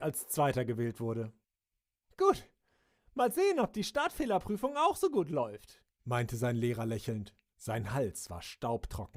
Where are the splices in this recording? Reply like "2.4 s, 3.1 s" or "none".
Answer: 3.0 s, 7.5 s